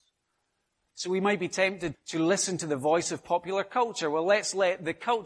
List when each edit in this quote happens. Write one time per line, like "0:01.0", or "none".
0:01.9

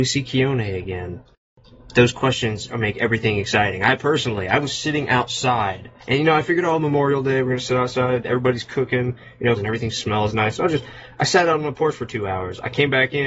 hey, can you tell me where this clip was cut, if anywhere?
0:06.0
0:09.6

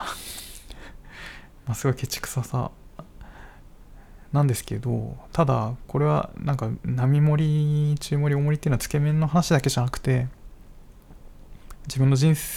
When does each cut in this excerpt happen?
none

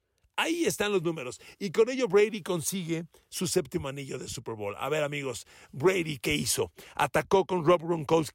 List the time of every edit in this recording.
none

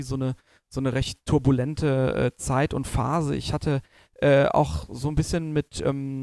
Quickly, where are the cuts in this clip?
none

